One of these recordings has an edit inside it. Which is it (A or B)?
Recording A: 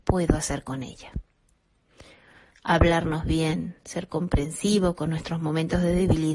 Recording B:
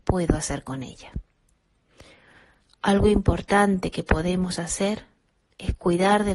A